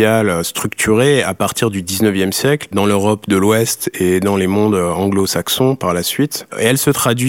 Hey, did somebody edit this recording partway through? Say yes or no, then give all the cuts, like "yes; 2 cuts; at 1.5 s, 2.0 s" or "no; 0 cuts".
yes; 1 cut; at 2.7 s